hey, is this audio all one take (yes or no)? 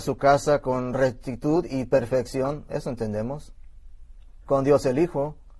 no